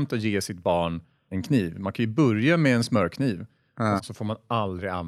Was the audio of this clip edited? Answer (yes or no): yes